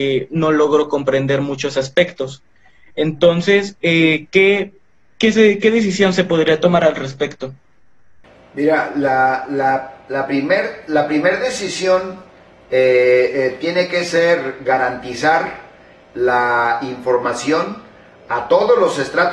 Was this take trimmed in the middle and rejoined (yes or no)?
no